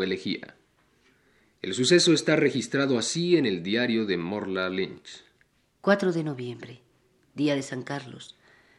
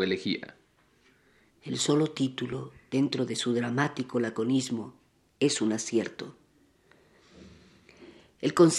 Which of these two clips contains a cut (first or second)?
second